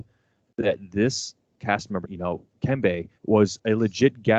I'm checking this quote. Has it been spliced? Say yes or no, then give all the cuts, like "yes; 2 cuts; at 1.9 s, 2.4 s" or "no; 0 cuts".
yes; 2 cuts; at 2.0 s, 3.2 s